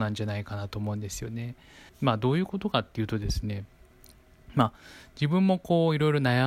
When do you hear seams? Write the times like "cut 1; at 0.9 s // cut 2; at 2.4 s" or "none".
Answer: cut 1; at 1.9 s